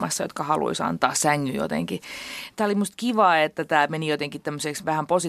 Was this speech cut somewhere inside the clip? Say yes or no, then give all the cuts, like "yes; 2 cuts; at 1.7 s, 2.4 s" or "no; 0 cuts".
no; 0 cuts